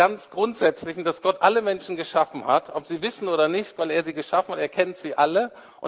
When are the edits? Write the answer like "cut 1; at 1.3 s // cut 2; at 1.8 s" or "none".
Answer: cut 1; at 3.8 s